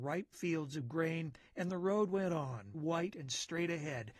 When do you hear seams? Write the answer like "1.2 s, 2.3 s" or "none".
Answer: 2.7 s